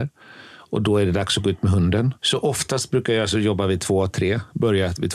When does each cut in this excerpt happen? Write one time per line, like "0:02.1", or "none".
0:02.2